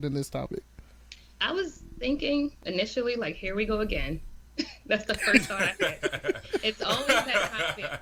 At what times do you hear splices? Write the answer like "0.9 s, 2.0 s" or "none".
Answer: none